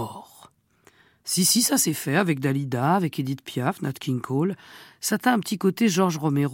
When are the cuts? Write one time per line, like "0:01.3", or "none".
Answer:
none